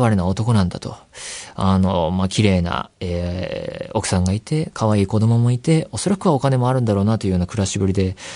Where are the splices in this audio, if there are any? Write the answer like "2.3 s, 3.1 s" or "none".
none